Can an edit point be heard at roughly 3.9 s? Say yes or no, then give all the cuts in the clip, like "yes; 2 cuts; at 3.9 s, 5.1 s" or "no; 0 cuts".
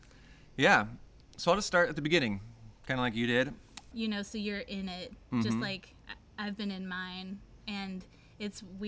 yes; 1 cut; at 3.9 s